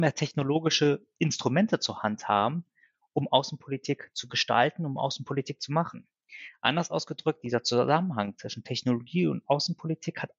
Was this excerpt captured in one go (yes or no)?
yes